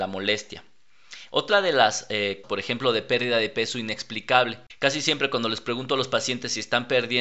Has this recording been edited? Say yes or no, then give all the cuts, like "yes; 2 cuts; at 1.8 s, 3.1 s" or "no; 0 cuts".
yes; 1 cut; at 2.4 s